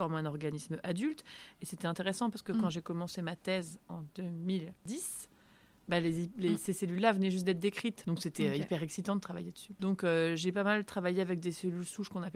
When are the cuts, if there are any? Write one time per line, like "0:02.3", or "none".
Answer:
0:08.0
0:09.8